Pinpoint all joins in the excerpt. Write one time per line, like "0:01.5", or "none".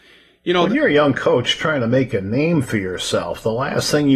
none